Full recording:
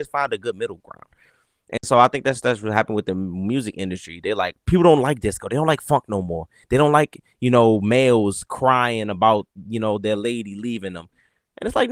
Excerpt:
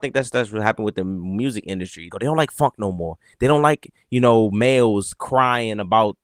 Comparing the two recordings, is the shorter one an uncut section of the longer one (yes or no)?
no